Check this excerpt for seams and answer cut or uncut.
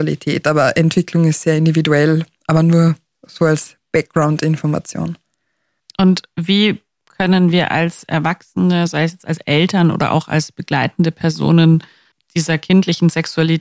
uncut